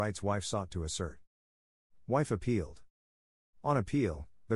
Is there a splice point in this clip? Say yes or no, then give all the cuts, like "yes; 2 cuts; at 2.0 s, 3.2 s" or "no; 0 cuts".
no; 0 cuts